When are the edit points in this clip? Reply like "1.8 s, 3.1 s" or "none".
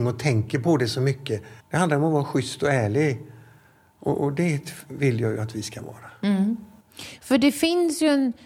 1.6 s